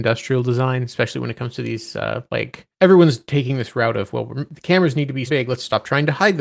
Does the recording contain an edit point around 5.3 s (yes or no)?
yes